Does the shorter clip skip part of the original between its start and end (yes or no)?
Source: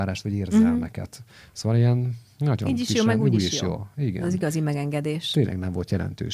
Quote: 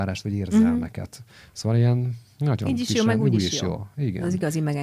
no